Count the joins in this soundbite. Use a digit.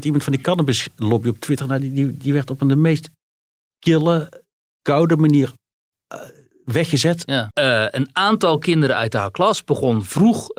1